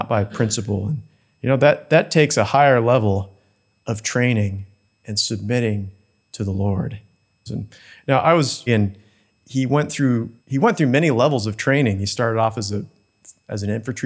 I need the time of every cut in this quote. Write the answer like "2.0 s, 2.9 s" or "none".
7.5 s, 8.7 s, 10.4 s

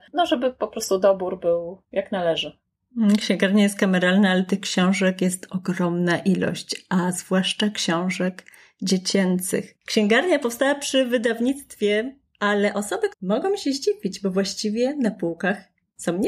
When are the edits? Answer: 9.8 s, 13.1 s

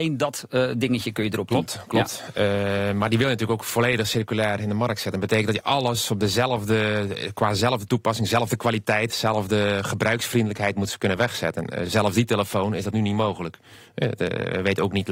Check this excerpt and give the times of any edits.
none

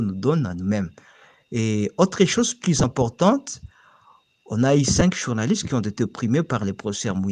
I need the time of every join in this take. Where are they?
none

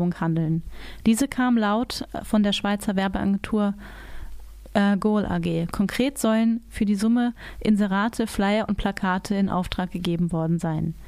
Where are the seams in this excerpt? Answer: none

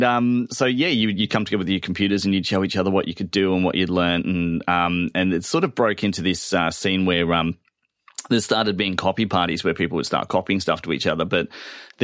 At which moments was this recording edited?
none

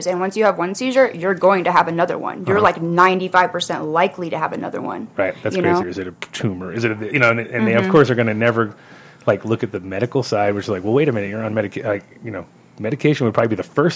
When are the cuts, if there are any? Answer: 5.8 s

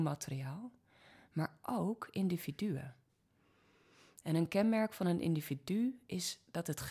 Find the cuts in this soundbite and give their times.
none

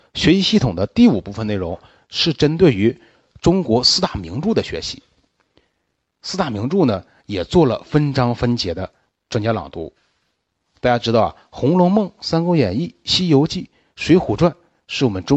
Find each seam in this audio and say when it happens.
none

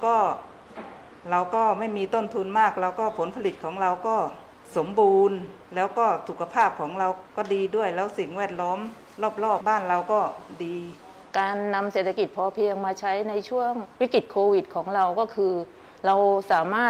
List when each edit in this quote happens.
5.6 s, 9.6 s, 13.9 s

